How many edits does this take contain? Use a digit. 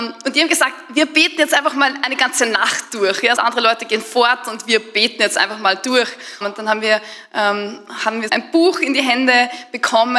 3